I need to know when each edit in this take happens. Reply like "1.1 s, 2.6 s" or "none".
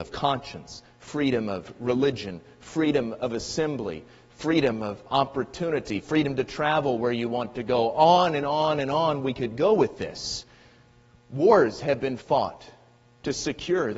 none